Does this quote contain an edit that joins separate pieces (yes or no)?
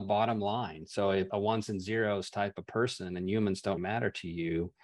yes